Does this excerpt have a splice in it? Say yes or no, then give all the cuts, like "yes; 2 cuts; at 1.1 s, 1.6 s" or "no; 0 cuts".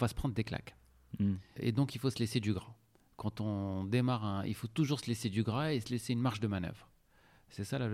yes; 1 cut; at 1.6 s